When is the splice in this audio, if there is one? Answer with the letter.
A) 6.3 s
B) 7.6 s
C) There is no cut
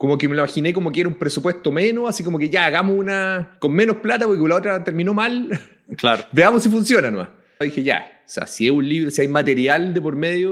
B